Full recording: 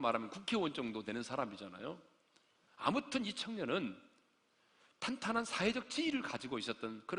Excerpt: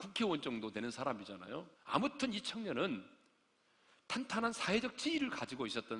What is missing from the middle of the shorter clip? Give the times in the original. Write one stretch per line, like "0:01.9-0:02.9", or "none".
0:02.1-0:02.7